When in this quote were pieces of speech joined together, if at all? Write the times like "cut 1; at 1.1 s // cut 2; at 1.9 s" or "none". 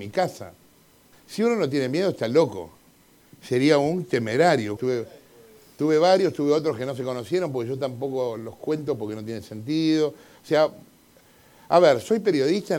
cut 1; at 1.1 s // cut 2; at 4.8 s

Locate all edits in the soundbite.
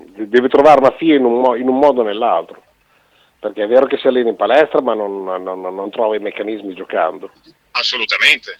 cut 1; at 7.6 s

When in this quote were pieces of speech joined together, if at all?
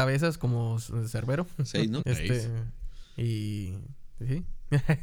cut 1; at 2.0 s

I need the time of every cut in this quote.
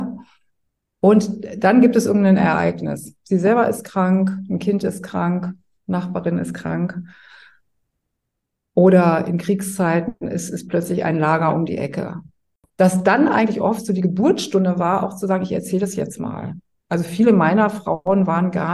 cut 1; at 12.7 s

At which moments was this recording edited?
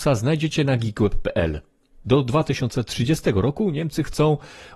cut 1; at 2.0 s

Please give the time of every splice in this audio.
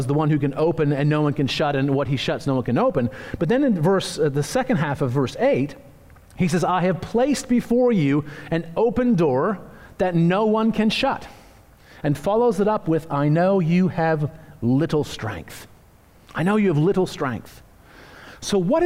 none

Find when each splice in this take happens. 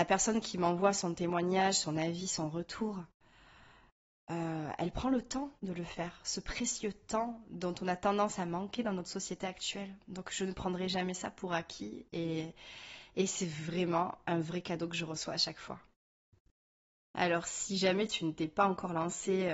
none

